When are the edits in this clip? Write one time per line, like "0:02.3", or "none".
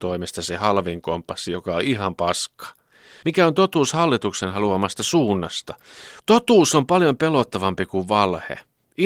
0:03.2
0:06.2